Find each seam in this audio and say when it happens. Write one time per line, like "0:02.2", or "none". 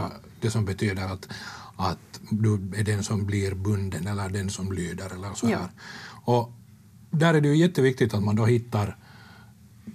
none